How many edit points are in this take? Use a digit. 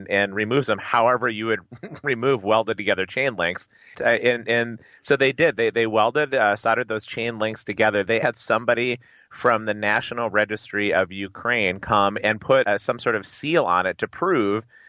3